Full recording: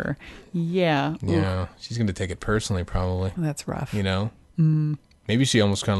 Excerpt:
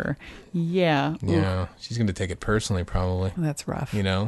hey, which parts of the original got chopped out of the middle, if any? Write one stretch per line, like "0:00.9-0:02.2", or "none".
none

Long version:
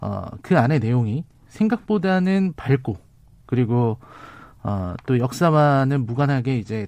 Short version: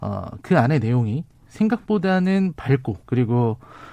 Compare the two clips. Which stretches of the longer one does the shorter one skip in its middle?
0:03.0-0:03.4

